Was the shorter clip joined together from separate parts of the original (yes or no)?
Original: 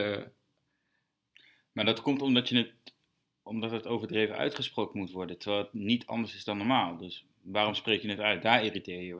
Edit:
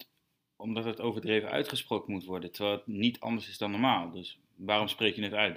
no